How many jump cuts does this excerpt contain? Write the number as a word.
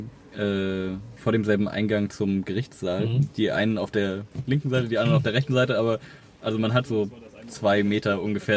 zero